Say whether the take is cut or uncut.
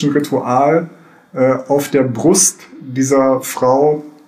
uncut